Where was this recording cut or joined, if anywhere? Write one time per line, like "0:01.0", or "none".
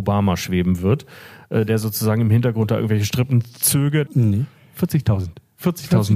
0:04.1